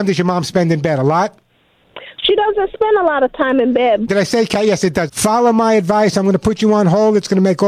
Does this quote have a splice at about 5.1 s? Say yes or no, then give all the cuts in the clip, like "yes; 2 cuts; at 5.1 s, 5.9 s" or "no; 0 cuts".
yes; 2 cuts; at 4.1 s, 5.1 s